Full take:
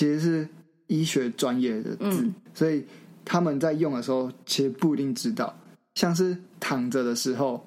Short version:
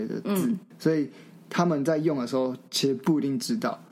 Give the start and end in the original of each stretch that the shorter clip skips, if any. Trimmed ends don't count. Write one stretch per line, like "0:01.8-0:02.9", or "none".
none